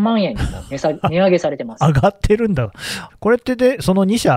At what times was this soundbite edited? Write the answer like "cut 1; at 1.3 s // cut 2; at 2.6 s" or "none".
cut 1; at 3.1 s

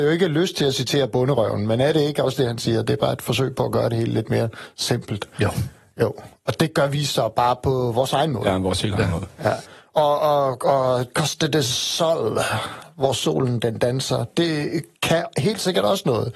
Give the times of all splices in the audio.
none

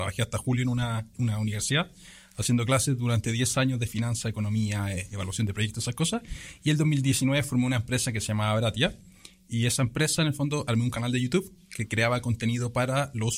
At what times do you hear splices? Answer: cut 1; at 1.2 s

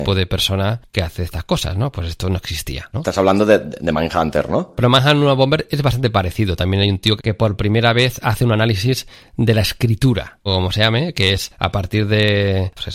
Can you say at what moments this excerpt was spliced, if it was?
cut 1; at 2.9 s // cut 2; at 7.2 s // cut 3; at 10.5 s

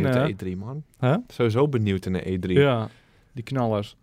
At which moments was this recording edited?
none

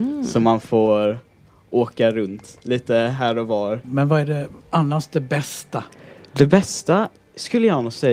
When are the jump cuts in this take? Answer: cut 1; at 3.8 s

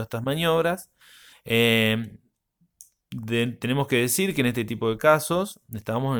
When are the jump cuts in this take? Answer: cut 1; at 1.3 s

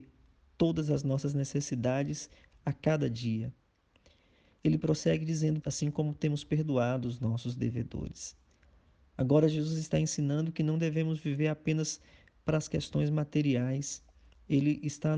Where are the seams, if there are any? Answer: cut 1; at 5.6 s

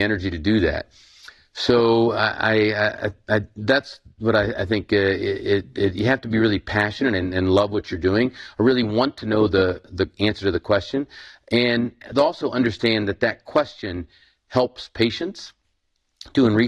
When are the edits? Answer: none

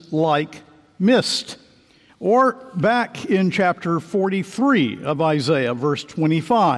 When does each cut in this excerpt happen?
cut 1; at 2.1 s

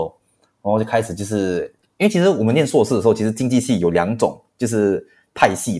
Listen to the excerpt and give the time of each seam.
none

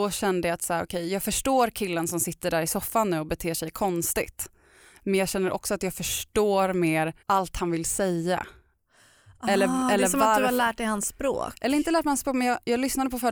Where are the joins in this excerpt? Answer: cut 1; at 7.2 s

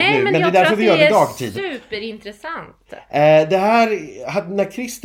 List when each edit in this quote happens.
none

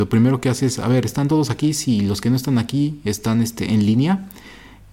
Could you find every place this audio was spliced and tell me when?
none

